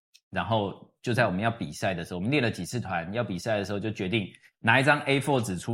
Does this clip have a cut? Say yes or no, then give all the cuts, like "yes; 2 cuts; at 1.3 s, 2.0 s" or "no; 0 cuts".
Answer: no; 0 cuts